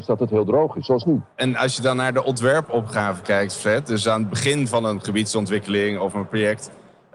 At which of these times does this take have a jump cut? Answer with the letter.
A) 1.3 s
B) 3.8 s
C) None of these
A